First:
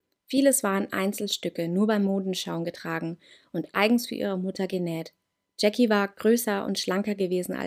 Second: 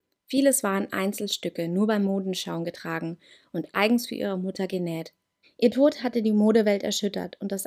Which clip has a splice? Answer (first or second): second